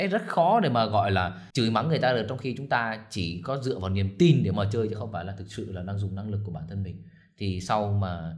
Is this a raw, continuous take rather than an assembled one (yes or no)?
no